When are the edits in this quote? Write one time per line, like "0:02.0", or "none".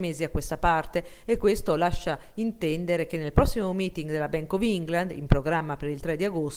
none